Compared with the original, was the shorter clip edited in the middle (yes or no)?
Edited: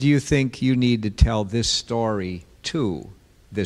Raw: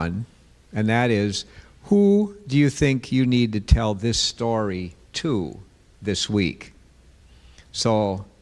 no